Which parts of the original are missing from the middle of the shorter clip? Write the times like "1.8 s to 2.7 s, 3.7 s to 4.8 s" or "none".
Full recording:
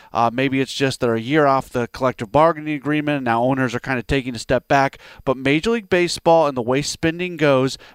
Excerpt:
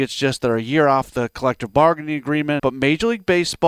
3.2 s to 5.2 s